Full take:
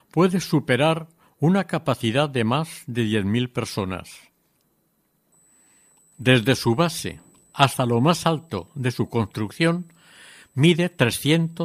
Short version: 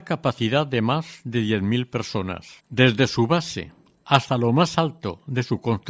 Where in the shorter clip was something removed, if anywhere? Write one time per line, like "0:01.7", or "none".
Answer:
0:02.6